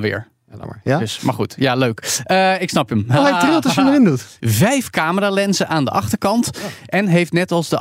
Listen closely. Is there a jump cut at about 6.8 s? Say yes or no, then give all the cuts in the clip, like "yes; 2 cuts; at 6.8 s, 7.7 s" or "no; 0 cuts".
no; 1 cut; at 4.4 s